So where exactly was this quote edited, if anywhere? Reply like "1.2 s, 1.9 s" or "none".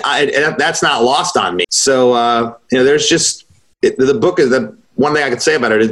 1.6 s